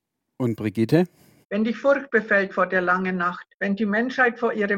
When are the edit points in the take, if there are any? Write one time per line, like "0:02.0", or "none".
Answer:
0:01.4
0:03.5